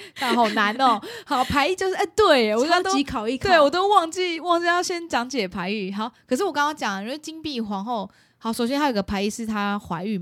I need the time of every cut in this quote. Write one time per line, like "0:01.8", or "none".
none